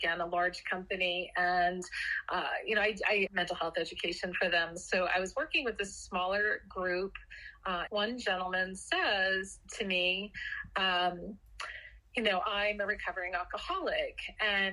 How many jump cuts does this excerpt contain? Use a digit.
2